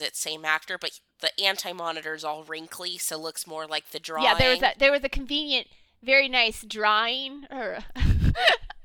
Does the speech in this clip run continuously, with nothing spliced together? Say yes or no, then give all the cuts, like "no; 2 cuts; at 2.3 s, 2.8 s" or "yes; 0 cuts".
yes; 0 cuts